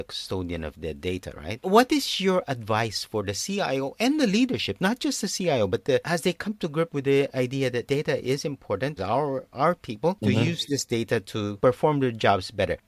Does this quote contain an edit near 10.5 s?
no; 2 cuts; at 6.0 s, 9.0 s

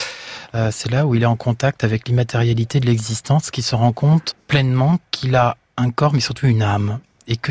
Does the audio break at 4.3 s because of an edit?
yes; 1 cut; at 4.3 s

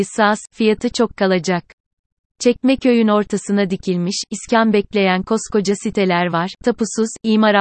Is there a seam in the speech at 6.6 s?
yes; 1 cut; at 6.6 s

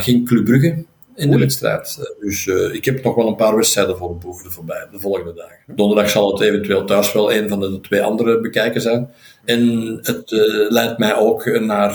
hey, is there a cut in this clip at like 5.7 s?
yes; 1 cut; at 5.7 s

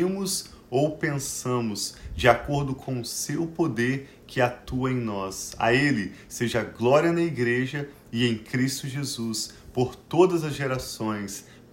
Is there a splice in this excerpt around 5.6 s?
no; 0 cuts

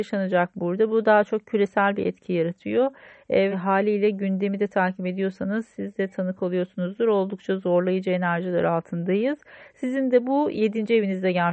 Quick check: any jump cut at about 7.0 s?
no; 1 cut; at 3.5 s

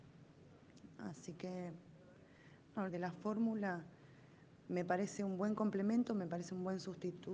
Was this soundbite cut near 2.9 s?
yes; 1 cut; at 2.9 s

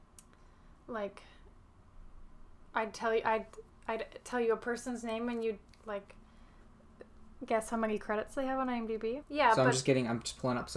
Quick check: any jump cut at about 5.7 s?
yes; 2 cuts; at 5.7 s, 9.2 s

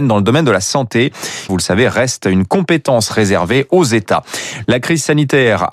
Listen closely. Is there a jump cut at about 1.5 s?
yes; 2 cuts; at 1.5 s, 4.6 s

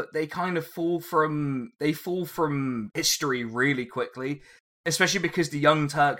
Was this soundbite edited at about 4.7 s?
no; 0 cuts

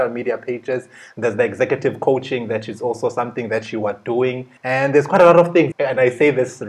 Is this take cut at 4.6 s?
yes; 2 cuts; at 4.6 s, 5.7 s

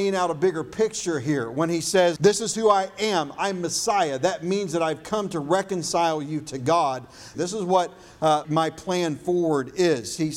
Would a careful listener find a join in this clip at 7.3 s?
yes; 3 cuts; at 2.2 s, 7.3 s, 8.4 s

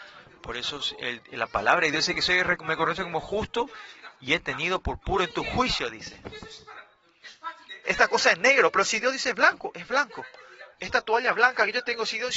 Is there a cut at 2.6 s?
no; 2 cuts; at 7.8 s, 10.7 s

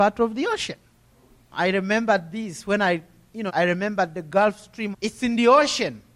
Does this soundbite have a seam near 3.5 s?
yes; 3 cuts; at 1.5 s, 3.5 s, 4.9 s

